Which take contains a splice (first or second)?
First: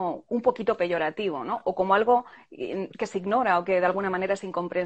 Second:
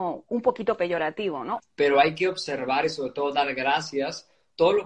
second